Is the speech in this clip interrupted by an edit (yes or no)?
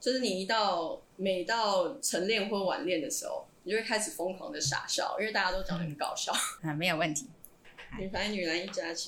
yes